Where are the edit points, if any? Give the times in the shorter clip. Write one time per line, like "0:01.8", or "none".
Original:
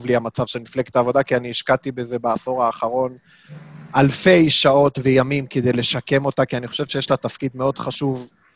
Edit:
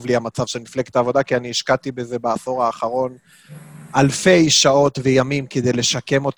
none